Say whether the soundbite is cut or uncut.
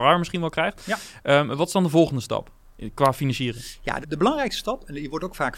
cut